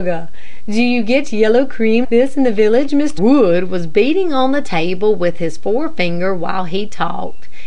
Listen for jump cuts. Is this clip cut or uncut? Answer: cut